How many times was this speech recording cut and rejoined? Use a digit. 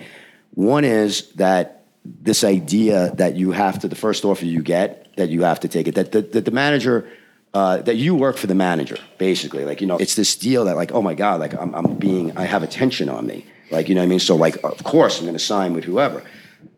1